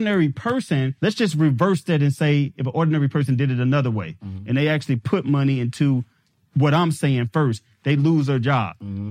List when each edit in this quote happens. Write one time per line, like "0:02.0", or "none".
0:01.0